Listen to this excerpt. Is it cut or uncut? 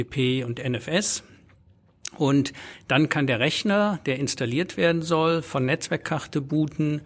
uncut